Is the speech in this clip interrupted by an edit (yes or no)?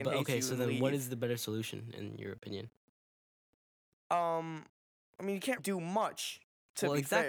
yes